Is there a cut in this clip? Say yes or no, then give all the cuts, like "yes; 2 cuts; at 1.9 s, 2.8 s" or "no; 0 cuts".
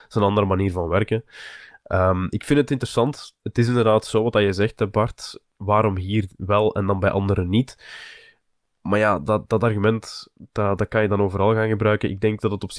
yes; 1 cut; at 3.4 s